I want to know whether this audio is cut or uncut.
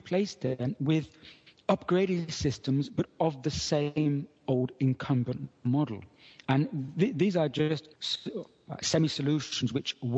cut